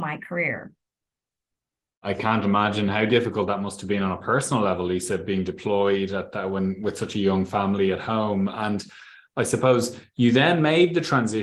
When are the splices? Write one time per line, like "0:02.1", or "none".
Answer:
none